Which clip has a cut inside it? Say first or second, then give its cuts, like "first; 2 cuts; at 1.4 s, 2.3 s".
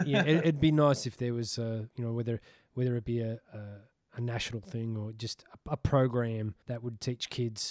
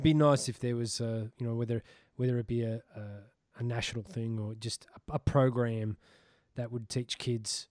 first; 1 cut; at 6.6 s